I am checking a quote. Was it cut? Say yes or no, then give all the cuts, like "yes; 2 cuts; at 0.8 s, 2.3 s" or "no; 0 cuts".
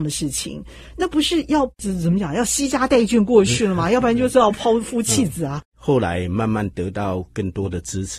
yes; 1 cut; at 5.6 s